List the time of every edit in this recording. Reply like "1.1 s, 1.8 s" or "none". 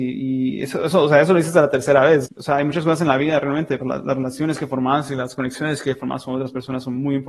2.2 s, 3.8 s

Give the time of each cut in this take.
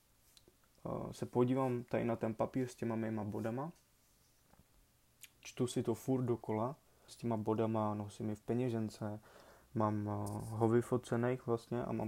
7.1 s

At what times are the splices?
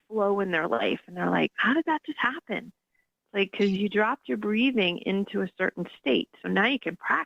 1.5 s

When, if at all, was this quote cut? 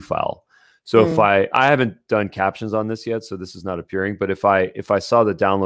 none

